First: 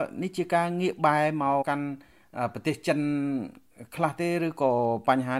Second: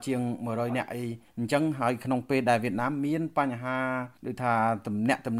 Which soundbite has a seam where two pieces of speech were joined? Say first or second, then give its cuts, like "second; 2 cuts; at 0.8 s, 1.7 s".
first; 1 cut; at 1.6 s